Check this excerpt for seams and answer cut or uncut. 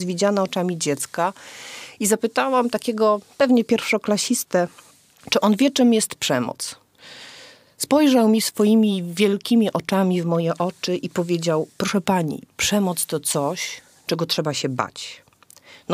uncut